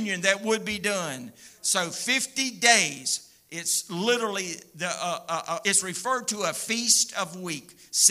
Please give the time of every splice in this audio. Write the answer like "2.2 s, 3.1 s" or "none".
1.5 s, 5.6 s